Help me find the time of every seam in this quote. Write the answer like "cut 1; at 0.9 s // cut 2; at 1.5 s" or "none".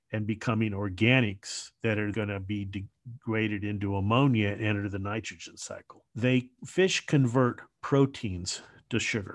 cut 1; at 2.1 s // cut 2; at 6.1 s